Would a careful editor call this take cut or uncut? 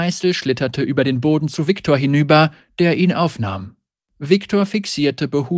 cut